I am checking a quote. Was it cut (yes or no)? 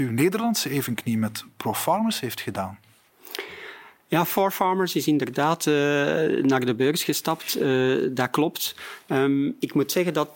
no